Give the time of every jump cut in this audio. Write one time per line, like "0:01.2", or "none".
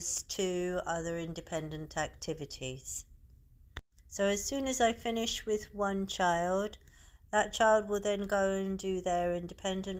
0:04.0

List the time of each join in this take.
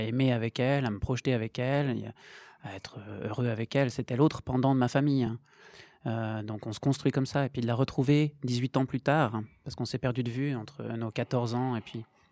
none

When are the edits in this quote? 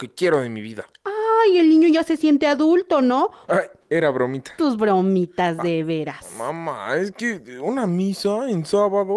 0:03.5
0:04.6

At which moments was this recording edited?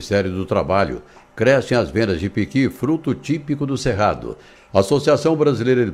0:04.5

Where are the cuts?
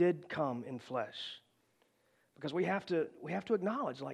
none

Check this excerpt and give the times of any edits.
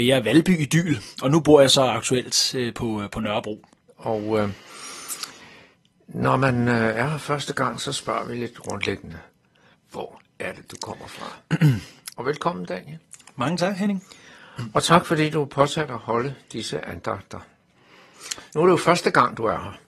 0:03.9
0:12.1

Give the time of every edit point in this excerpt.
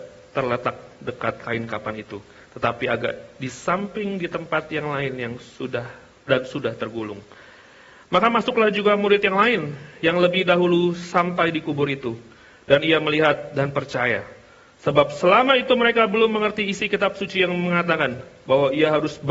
none

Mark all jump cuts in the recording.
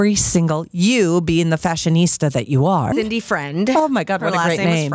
0:02.9

